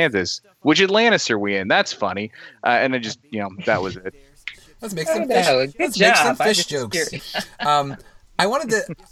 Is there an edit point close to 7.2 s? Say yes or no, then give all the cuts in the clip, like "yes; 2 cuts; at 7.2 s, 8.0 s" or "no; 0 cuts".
yes; 1 cut; at 7.2 s